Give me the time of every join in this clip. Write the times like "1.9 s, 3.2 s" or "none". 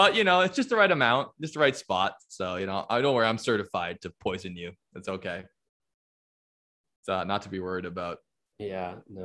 none